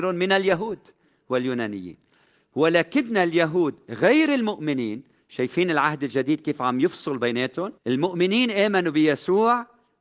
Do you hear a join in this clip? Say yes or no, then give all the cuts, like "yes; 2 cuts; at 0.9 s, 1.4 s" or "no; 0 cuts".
yes; 1 cut; at 7.8 s